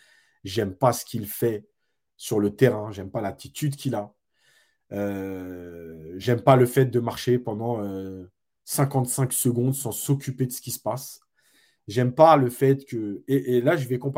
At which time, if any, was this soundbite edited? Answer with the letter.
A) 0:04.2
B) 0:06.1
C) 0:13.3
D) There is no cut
D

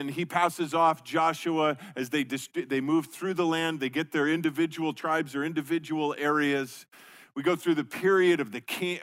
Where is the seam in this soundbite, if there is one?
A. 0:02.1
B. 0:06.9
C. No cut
C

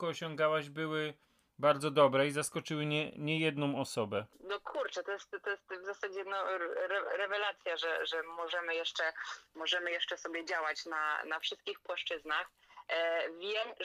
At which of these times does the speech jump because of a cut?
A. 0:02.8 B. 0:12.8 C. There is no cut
C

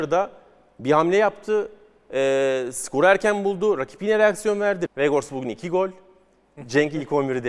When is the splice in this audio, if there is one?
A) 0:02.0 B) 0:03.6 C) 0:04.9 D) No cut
C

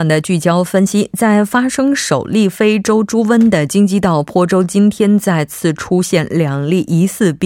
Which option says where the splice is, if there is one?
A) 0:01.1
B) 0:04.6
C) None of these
C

